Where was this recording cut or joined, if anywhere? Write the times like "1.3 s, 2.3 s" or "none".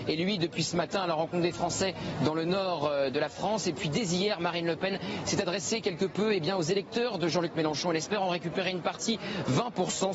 none